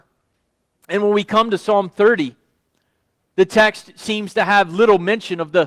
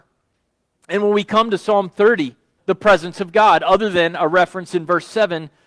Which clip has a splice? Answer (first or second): second